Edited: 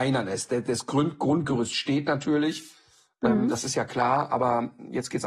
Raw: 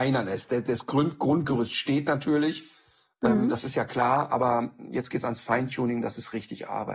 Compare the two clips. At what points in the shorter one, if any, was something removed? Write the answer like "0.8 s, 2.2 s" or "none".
none

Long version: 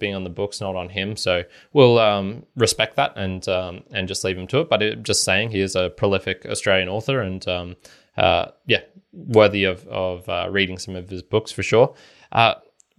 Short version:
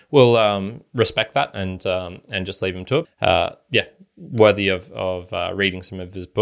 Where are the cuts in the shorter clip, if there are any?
3.0 s

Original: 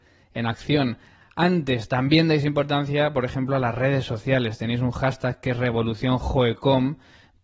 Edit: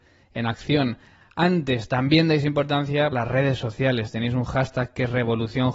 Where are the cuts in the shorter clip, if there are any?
3.1 s

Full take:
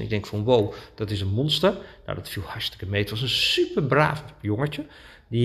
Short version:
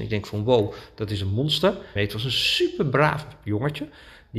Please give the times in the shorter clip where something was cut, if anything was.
2.0 s

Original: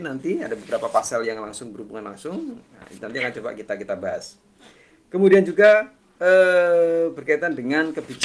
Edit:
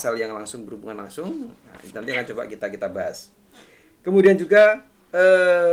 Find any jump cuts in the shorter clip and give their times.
none

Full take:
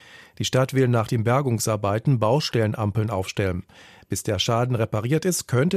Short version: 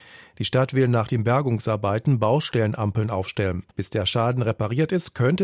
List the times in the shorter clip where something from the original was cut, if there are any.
3.7 s

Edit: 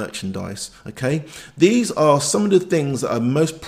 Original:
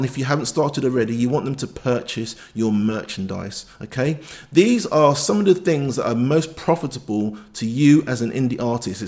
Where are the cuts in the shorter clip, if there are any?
none

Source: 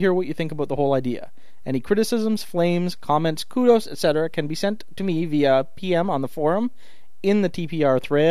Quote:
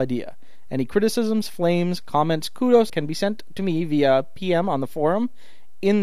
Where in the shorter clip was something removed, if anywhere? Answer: 2.9 s

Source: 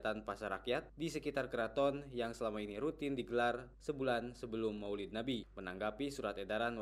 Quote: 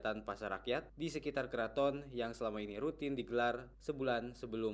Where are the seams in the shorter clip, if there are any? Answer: none

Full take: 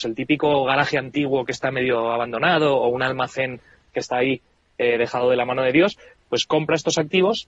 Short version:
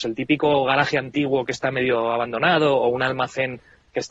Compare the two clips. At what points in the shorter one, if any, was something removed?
none

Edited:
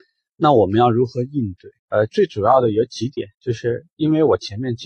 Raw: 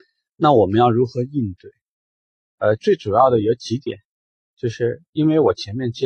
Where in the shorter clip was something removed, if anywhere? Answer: 1.8 s, 3.3 s

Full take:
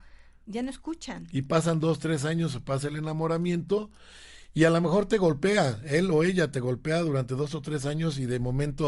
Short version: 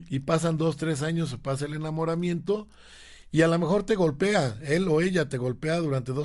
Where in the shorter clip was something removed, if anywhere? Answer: none

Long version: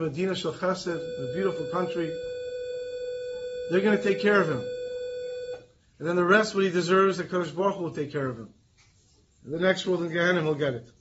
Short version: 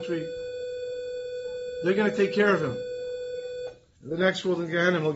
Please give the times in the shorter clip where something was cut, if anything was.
4.0 s

